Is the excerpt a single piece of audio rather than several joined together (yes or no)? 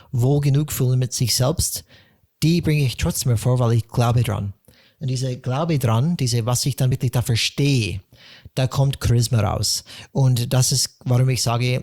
yes